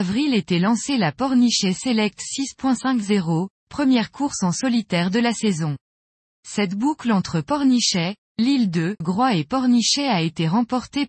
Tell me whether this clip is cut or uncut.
cut